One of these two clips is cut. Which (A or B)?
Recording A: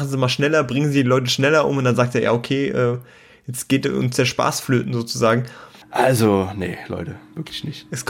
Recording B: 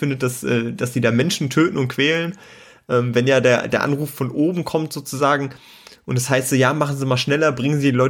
A